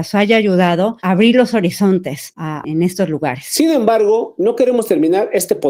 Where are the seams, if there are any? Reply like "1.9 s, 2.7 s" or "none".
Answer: 2.6 s

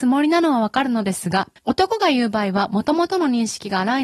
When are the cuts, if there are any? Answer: 1.6 s

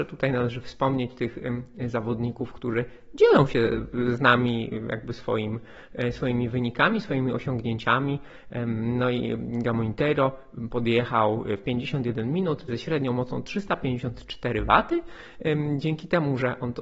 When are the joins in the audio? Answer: 12.7 s

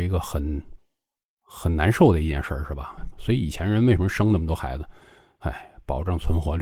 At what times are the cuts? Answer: 3.1 s

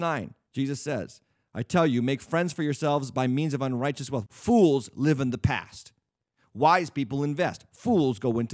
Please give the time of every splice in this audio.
4.3 s

